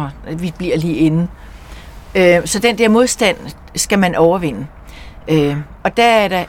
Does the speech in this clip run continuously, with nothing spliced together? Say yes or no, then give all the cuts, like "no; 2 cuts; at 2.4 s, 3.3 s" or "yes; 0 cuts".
yes; 0 cuts